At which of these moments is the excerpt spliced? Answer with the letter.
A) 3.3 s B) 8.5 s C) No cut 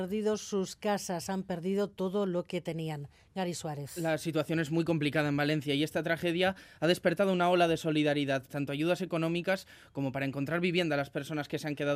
B